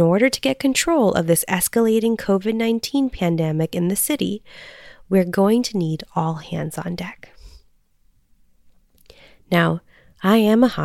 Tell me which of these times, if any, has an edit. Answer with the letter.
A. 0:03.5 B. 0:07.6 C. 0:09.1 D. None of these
D